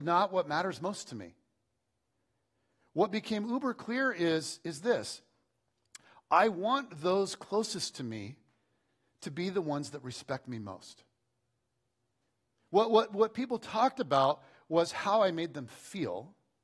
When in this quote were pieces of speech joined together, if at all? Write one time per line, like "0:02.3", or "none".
0:12.6

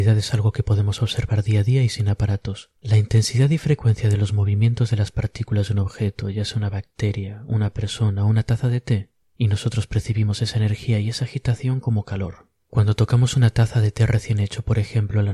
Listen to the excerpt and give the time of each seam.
0:02.8
0:09.2

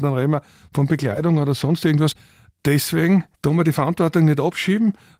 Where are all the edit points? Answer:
0:03.3

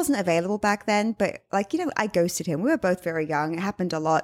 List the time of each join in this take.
none

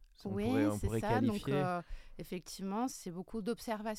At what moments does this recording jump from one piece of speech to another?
0:02.9

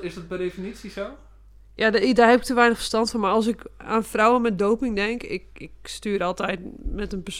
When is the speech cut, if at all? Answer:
none

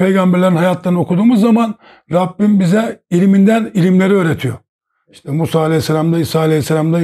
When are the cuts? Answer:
none

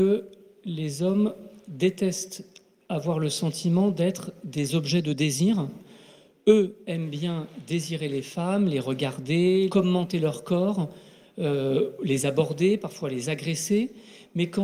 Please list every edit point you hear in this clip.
0:09.7

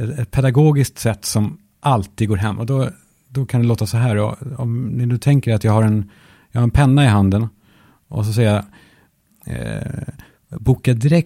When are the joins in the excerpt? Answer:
none

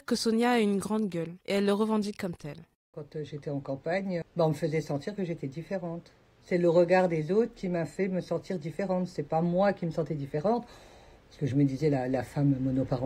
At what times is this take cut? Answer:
0:01.4
0:02.9
0:04.2

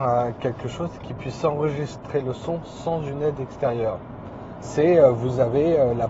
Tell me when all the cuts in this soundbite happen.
0:04.6

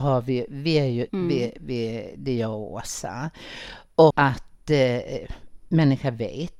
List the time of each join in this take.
0:01.1
0:04.1

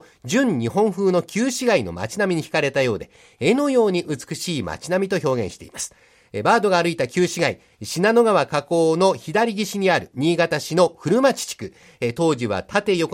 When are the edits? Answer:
none

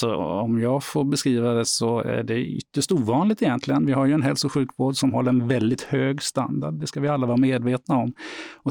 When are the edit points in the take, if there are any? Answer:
none

